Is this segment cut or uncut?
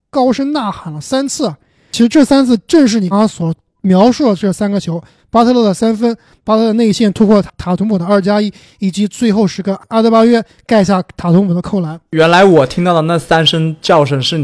cut